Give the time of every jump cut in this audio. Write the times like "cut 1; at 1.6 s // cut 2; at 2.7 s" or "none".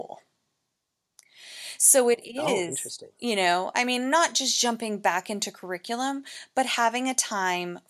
none